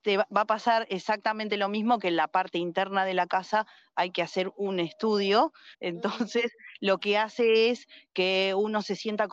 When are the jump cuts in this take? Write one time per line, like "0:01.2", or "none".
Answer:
0:05.7